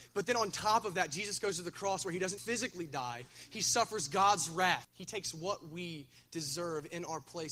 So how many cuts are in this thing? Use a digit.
2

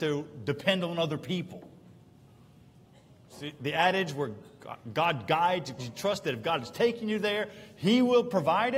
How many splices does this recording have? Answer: 1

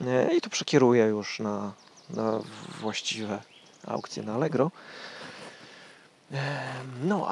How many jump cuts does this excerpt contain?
0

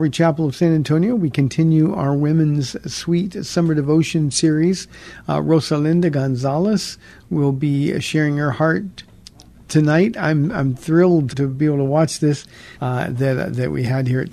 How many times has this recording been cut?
2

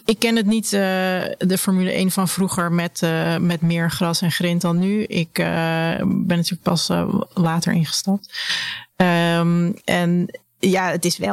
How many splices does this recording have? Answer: 0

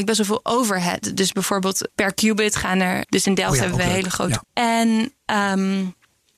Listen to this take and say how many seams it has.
3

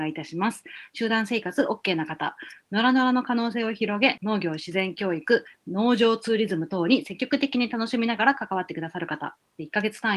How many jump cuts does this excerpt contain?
2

